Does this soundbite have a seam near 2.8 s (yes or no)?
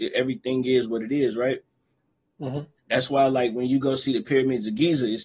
yes